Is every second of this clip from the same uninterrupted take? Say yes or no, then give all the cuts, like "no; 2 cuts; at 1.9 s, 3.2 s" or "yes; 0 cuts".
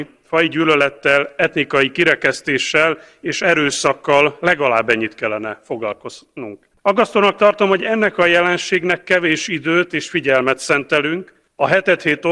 no; 1 cut; at 6.7 s